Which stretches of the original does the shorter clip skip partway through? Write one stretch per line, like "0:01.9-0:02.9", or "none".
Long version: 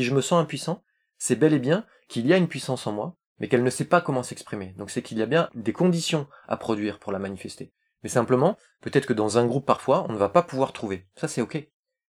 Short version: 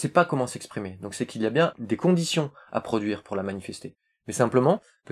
none